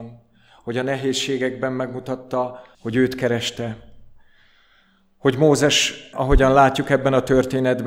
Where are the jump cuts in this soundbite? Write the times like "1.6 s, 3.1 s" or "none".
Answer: 2.7 s, 6.1 s